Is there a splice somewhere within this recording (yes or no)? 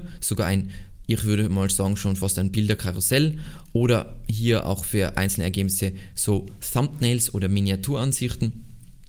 no